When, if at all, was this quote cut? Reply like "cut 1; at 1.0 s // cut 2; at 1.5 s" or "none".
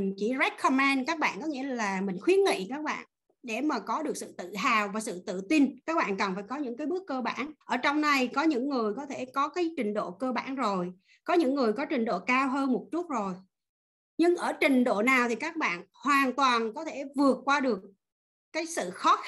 cut 1; at 7.6 s